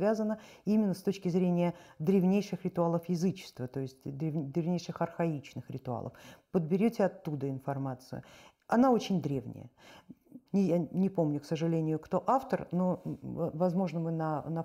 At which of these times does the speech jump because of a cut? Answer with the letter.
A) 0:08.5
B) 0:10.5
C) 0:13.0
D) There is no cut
B